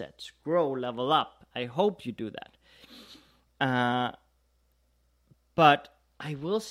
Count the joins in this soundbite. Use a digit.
0